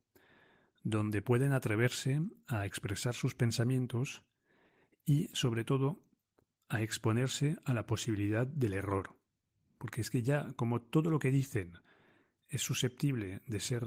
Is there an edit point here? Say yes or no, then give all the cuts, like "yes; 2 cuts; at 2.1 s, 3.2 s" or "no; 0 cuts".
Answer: no; 0 cuts